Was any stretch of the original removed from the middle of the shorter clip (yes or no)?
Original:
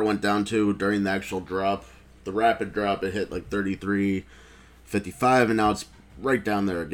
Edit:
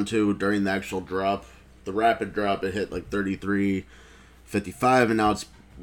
no